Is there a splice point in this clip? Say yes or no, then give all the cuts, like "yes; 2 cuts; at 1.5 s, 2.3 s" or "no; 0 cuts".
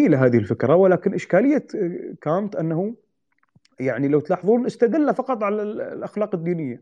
no; 0 cuts